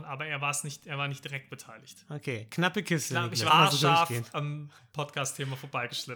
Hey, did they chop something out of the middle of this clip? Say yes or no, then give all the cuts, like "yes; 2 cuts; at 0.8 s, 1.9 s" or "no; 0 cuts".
yes; 1 cut; at 3.5 s